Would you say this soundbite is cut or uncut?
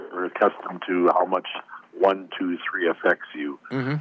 uncut